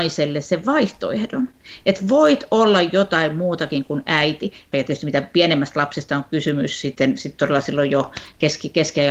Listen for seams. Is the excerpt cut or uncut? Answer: cut